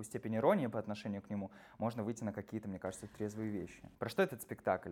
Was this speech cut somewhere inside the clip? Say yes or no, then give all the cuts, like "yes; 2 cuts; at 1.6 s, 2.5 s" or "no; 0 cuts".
yes; 1 cut; at 3.9 s